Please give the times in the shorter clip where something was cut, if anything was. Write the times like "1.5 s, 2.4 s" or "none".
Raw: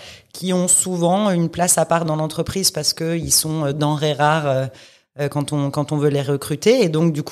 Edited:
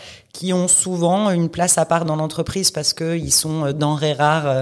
none